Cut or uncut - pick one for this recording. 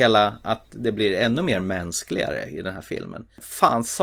uncut